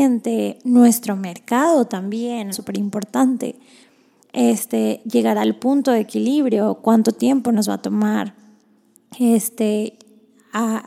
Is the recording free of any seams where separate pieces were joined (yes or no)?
no